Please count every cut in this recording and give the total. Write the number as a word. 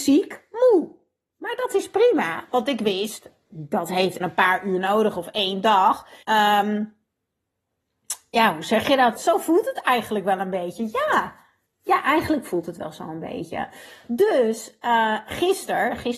three